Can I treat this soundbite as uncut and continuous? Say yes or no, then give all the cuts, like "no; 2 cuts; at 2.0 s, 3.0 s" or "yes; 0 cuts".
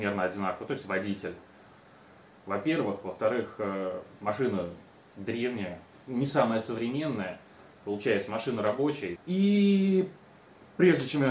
no; 2 cuts; at 2.4 s, 9.2 s